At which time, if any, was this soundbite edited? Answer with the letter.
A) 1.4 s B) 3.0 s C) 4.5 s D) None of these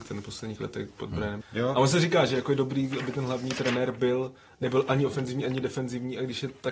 A